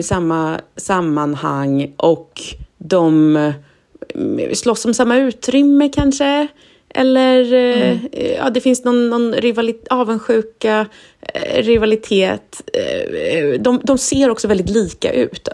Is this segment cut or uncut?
uncut